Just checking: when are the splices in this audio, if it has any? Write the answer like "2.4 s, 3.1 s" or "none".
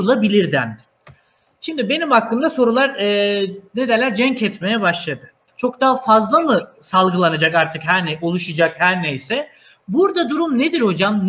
5.5 s